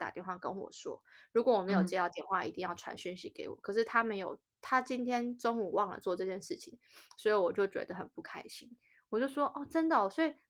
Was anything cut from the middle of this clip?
no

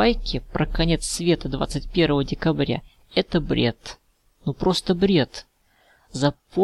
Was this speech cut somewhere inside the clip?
no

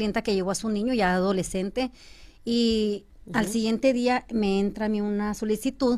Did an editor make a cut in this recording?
no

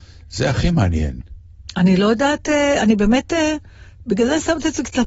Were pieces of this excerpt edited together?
no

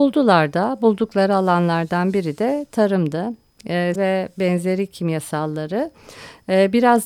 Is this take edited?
yes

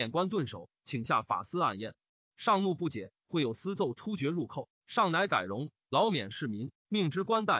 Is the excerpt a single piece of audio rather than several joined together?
yes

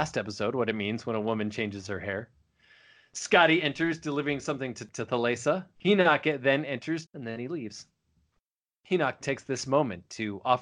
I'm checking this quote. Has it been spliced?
yes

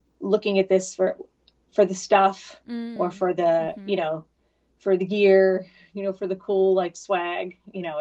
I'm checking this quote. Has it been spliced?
no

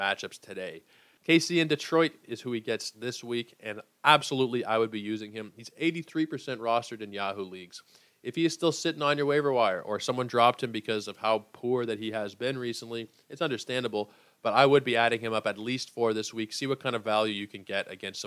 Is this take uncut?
no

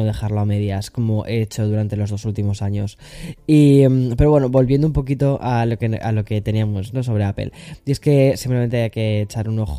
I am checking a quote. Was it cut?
no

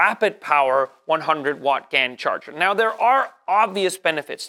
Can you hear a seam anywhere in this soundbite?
no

